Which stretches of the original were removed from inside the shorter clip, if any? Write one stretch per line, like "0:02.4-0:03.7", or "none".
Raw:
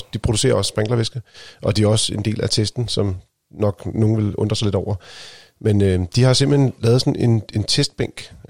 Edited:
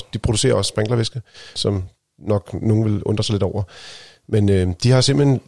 0:01.6-0:02.9